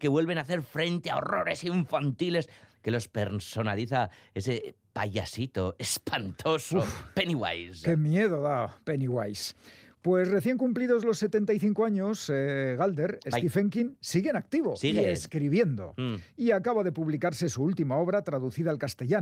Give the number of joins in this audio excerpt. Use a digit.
0